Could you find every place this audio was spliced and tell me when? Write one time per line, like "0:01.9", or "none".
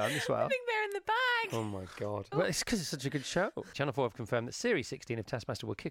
0:02.3
0:03.7